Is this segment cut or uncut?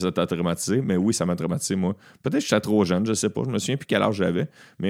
uncut